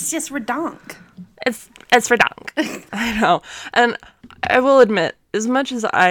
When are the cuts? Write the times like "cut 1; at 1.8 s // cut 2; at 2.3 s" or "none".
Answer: cut 1; at 2.9 s

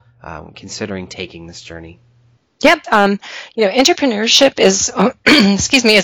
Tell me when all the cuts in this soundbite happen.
cut 1; at 2.8 s

